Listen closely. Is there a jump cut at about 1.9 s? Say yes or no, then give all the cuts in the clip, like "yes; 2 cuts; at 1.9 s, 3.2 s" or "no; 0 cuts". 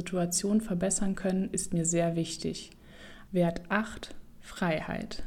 no; 1 cut; at 3.3 s